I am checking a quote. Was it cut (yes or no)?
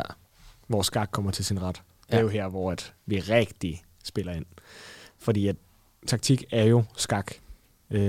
no